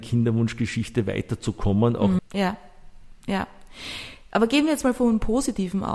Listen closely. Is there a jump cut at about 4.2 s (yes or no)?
no